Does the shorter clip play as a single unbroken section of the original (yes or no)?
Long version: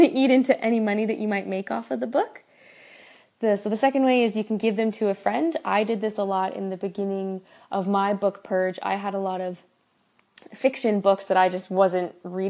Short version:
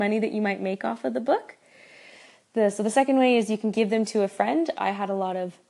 no